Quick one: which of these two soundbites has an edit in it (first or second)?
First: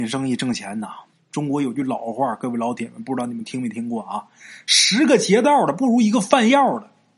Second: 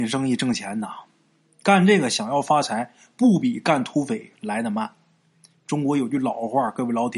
first